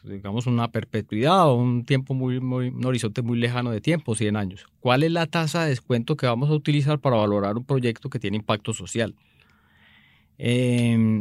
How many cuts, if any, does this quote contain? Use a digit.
1